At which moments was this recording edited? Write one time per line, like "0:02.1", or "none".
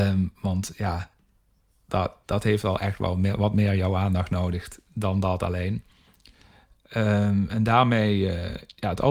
none